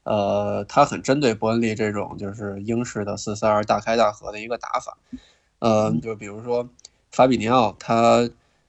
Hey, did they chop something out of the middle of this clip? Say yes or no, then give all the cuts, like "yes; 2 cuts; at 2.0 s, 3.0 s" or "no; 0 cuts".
yes; 1 cut; at 6.0 s